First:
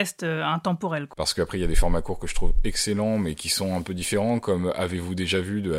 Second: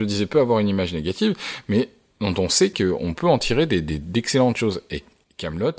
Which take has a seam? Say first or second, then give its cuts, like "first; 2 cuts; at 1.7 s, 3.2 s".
first; 1 cut; at 1.1 s